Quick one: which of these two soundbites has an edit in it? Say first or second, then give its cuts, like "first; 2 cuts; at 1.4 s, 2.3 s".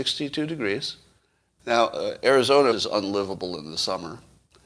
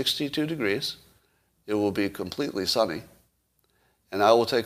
first; 2 cuts; at 1.6 s, 2.7 s